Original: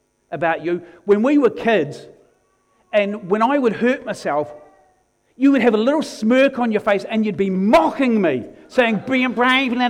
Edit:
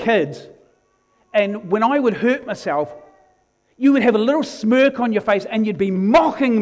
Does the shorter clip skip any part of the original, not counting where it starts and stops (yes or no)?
no